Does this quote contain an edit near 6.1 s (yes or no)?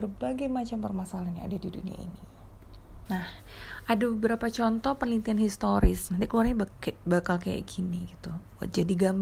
yes